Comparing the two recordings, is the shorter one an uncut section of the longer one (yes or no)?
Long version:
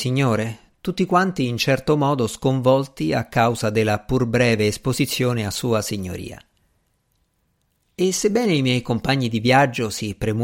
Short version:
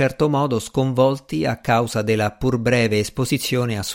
yes